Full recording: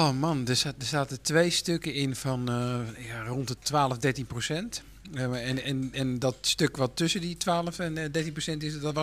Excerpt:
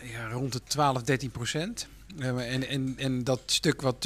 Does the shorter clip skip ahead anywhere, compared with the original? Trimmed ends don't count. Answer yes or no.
no